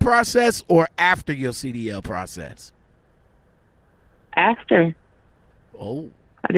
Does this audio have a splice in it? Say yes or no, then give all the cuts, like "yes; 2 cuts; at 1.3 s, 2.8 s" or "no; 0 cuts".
no; 0 cuts